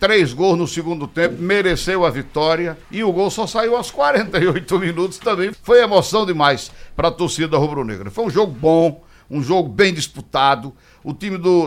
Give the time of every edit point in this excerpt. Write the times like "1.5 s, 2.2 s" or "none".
2.8 s, 5.5 s

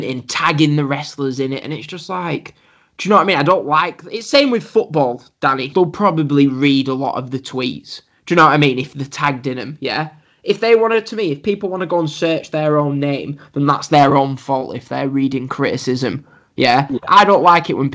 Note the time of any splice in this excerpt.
5.7 s

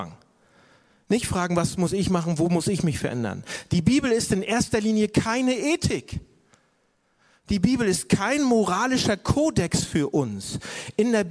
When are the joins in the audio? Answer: none

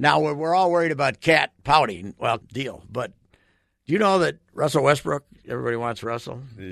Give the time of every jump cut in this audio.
2.4 s

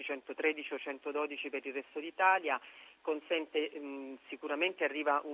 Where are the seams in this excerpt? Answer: none

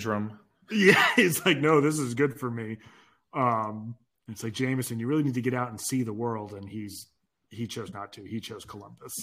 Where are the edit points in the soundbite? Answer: none

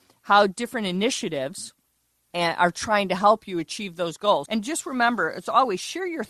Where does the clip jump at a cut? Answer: 2.3 s, 4.5 s

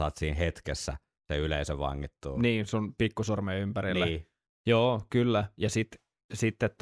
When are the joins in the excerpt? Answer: none

